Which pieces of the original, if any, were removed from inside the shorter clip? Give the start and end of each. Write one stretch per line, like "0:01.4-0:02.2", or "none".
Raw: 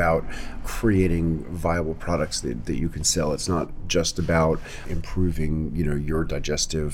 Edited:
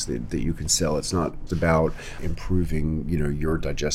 0:03.8-0:04.1